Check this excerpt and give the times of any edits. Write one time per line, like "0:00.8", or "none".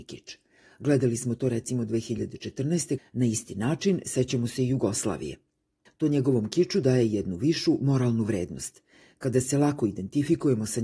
0:03.0
0:05.9